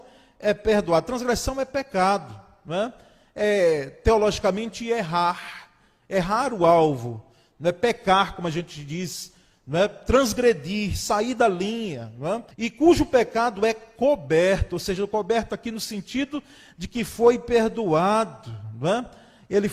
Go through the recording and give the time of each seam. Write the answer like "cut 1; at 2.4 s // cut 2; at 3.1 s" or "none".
cut 1; at 12.5 s